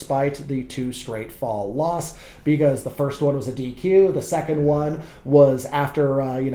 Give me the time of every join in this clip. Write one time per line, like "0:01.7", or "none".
none